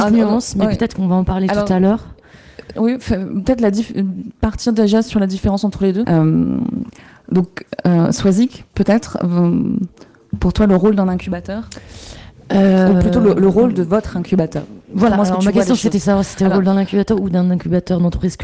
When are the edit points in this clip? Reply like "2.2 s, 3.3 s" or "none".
2.8 s, 6.0 s